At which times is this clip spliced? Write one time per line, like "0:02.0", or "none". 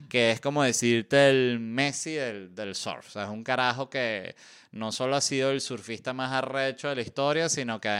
none